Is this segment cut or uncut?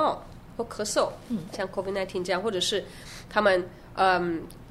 cut